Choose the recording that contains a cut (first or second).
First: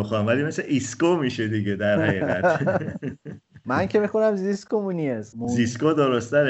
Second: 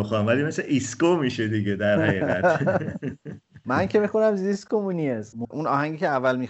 second